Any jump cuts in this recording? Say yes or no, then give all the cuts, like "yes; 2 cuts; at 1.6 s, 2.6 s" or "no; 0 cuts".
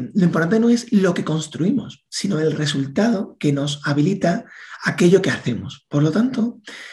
no; 0 cuts